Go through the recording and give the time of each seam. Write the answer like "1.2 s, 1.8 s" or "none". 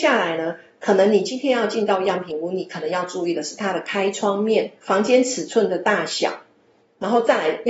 4.8 s